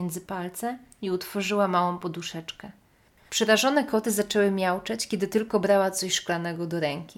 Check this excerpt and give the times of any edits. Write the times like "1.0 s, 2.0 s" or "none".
3.2 s